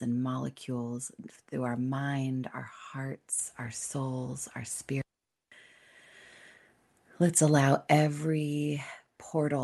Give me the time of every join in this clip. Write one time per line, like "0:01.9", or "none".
none